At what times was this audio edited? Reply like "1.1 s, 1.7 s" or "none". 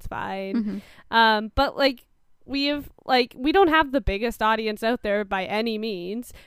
none